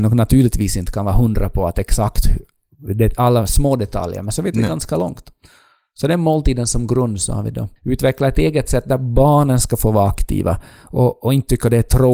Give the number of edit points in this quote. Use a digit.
1